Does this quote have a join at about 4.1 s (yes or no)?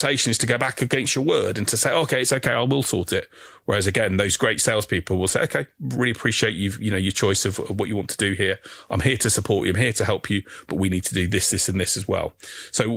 no